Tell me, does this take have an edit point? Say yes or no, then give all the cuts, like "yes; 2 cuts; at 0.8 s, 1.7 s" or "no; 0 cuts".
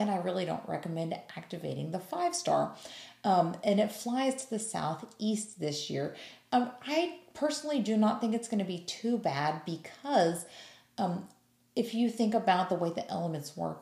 no; 0 cuts